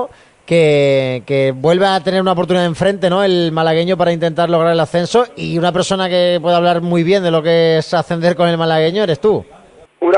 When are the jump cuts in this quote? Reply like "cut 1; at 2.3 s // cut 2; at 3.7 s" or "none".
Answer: none